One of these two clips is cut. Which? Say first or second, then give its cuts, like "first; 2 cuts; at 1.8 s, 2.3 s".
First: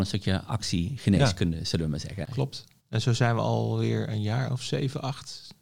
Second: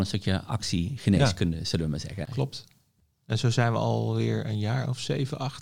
first; 1 cut; at 2.8 s